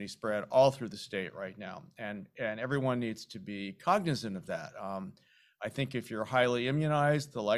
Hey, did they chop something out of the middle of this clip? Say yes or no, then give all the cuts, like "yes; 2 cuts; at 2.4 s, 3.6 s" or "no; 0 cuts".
no; 0 cuts